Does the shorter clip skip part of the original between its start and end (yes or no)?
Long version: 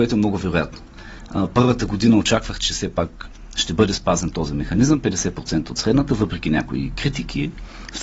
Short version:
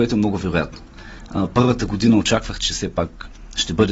no